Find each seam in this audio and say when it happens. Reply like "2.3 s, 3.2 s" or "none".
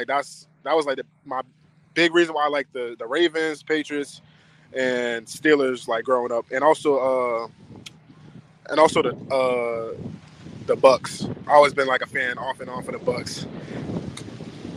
none